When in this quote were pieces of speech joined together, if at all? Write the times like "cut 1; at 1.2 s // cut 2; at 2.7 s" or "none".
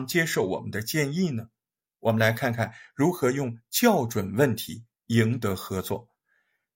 none